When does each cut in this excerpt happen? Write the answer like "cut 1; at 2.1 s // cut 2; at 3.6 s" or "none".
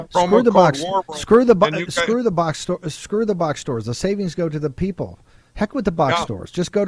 none